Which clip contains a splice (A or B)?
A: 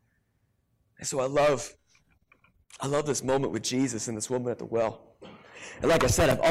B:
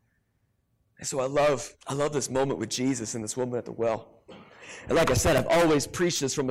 B